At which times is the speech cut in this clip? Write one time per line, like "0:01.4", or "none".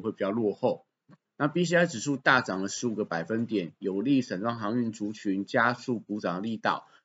0:01.2